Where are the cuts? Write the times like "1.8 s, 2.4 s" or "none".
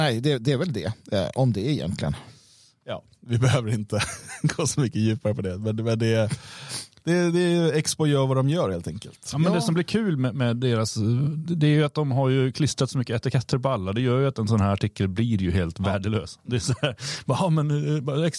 none

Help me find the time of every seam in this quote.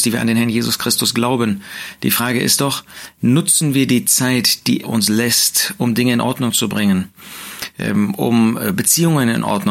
4.8 s

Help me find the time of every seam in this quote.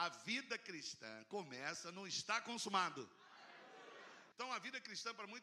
4.3 s

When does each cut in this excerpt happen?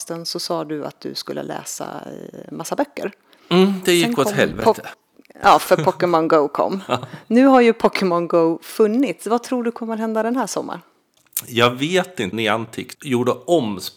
none

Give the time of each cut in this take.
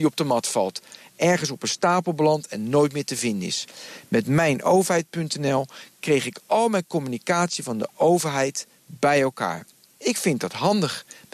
none

